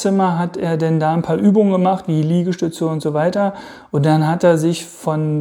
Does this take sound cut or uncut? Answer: uncut